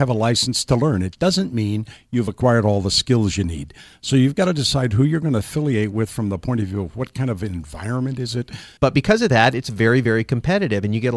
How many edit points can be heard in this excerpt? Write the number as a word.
one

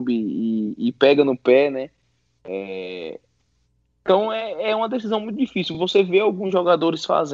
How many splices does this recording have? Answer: zero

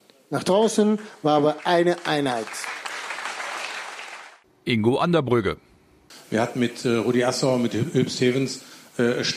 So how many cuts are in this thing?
zero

